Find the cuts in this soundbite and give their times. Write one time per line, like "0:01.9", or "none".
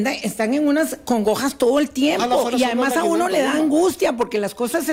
none